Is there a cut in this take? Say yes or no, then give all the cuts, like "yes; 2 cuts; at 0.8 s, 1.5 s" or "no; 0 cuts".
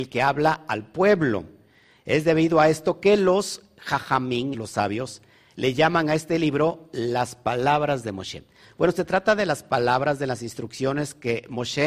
yes; 2 cuts; at 4.5 s, 8.6 s